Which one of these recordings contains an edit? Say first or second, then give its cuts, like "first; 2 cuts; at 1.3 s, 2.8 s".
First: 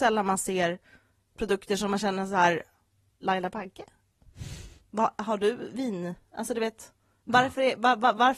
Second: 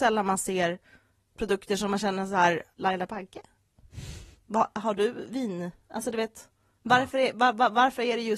second; 1 cut; at 2.7 s